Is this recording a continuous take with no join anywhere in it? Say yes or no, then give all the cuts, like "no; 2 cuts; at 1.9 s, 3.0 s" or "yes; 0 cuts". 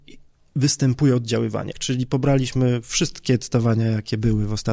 no; 1 cut; at 1.7 s